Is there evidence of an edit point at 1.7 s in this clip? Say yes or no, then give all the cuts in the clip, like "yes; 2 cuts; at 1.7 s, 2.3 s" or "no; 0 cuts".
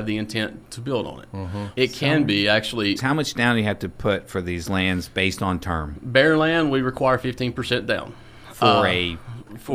yes; 2 cuts; at 1.7 s, 3.0 s